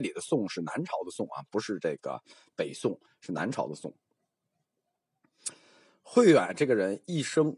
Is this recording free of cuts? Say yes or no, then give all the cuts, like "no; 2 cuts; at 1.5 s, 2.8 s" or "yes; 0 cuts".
yes; 0 cuts